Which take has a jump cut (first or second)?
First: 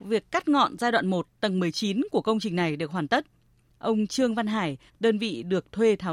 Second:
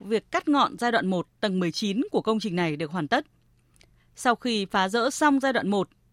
first